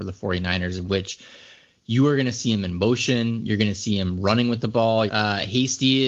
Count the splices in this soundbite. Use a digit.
1